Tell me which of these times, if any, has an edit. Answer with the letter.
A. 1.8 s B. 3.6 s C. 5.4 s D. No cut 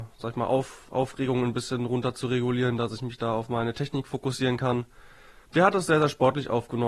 C